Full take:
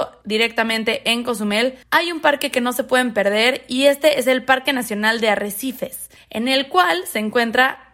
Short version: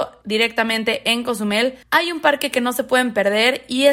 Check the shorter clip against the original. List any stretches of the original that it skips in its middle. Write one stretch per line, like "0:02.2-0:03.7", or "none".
none